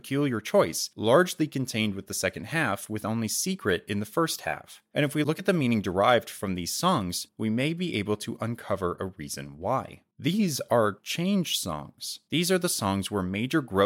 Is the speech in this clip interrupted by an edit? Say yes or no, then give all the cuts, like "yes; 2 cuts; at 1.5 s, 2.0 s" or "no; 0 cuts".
no; 0 cuts